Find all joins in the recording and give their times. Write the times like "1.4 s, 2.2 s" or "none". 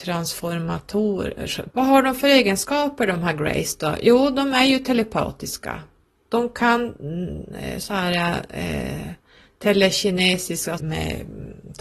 1.7 s, 10.8 s